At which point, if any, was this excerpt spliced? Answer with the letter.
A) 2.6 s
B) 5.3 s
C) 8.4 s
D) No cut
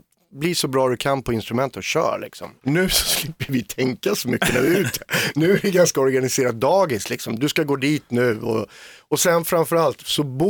A